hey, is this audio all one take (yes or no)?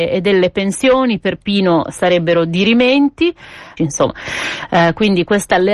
no